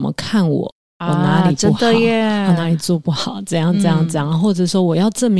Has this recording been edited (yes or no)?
no